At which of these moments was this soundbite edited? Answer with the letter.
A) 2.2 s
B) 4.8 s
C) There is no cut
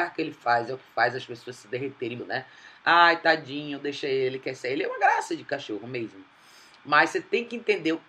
A